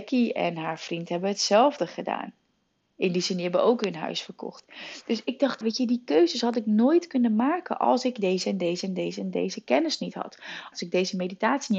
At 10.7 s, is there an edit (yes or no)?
yes